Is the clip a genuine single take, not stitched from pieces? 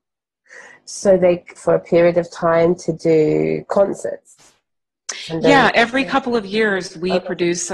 no; 1 cut; at 1.6 s

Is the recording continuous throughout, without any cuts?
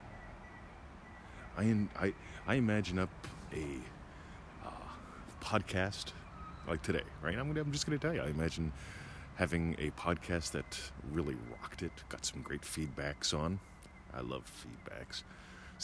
no; 1 cut; at 1.5 s

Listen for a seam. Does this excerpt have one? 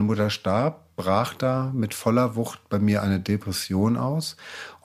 no; 0 cuts

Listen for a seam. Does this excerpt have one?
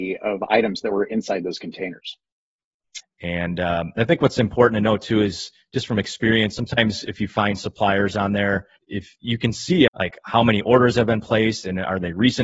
yes; 3 cuts; at 3.0 s, 8.8 s, 9.9 s

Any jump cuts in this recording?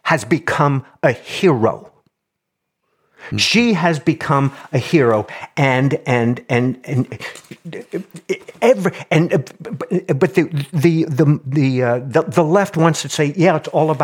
no; 0 cuts

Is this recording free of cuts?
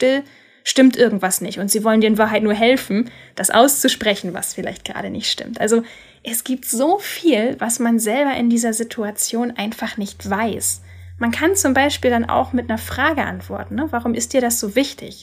yes; 0 cuts

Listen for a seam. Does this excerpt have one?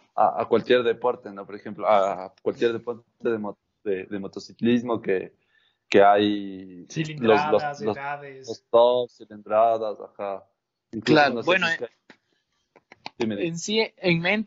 no; 0 cuts

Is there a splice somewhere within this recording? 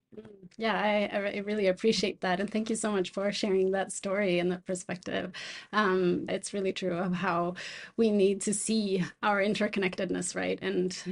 yes; 1 cut; at 6.3 s

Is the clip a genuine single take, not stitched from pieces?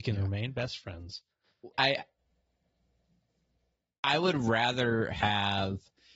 no; 1 cut; at 1.7 s

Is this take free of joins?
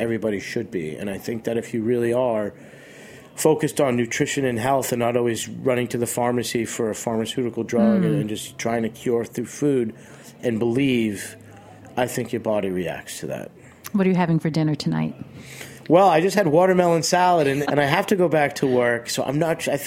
no; 1 cut; at 17.6 s

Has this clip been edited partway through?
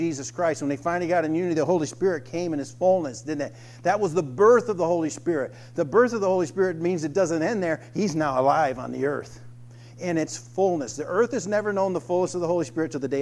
no; 0 cuts

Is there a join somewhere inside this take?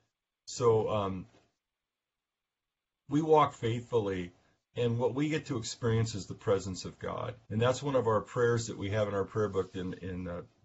yes; 1 cut; at 7.4 s

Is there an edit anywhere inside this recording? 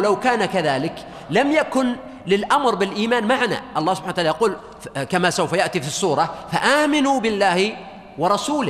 no; 0 cuts

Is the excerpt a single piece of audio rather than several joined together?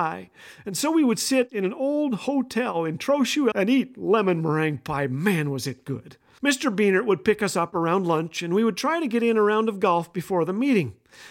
no; 2 cuts; at 3.5 s, 6.4 s

